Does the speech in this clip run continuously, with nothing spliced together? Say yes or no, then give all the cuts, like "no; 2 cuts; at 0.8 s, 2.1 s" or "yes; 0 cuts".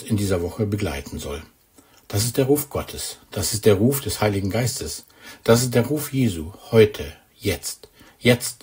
yes; 0 cuts